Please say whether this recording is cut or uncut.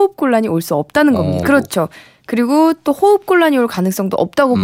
cut